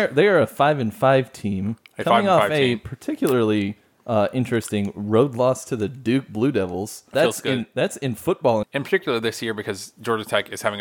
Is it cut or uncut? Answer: cut